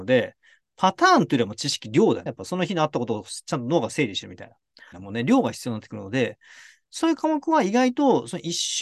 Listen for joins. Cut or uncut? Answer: cut